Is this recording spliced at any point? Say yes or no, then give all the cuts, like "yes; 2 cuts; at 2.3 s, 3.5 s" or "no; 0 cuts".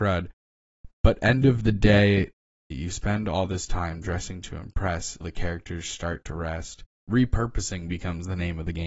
yes; 3 cuts; at 2.7 s, 5.2 s, 6.9 s